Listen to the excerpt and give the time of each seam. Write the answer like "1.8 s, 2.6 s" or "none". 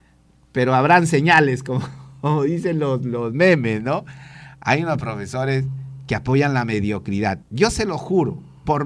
7.4 s